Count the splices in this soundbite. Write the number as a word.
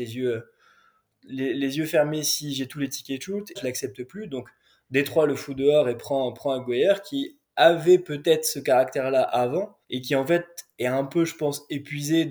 two